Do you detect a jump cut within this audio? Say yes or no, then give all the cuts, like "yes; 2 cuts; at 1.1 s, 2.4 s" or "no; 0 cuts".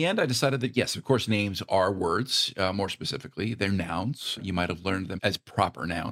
yes; 1 cut; at 5.2 s